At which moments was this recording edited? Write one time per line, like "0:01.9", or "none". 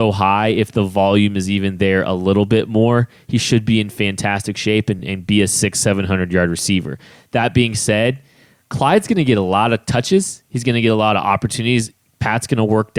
none